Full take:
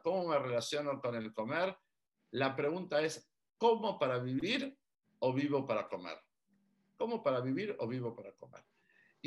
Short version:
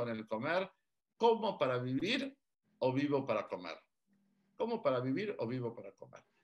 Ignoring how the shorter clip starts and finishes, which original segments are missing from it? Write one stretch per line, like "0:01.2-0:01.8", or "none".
0:02.2-0:03.5

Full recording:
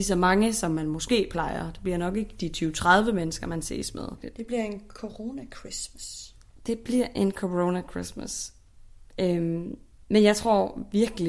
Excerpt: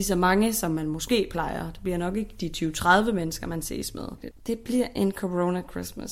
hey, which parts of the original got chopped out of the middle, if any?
0:04.3-0:06.5

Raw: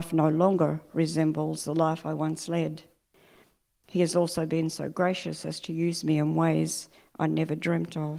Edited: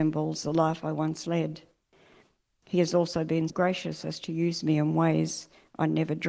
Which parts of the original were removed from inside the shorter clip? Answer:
0:04.7-0:04.9

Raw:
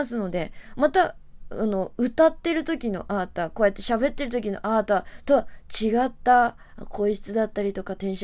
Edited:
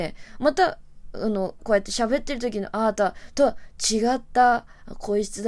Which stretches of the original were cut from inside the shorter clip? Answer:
0:02.0-0:03.5

